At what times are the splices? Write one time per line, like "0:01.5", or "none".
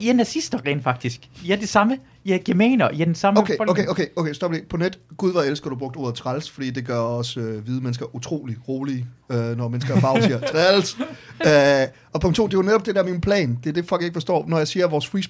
none